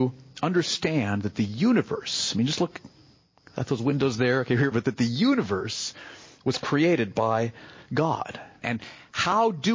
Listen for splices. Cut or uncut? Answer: cut